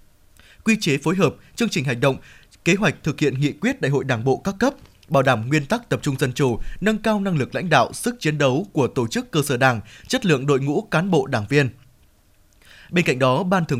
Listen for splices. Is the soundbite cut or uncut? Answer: uncut